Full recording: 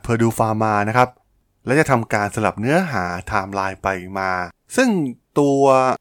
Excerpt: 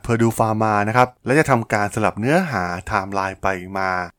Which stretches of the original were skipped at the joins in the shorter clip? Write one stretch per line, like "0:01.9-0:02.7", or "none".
0:01.2-0:01.6